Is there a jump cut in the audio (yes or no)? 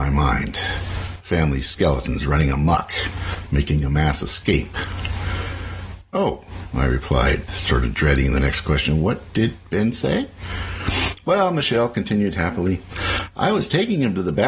yes